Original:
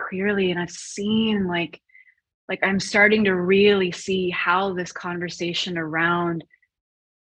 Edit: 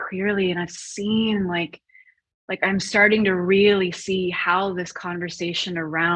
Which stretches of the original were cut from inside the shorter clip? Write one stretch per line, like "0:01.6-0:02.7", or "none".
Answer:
none